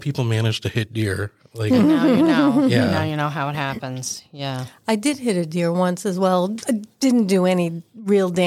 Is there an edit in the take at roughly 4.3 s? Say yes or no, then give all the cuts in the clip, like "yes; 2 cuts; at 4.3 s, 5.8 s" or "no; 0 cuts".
no; 0 cuts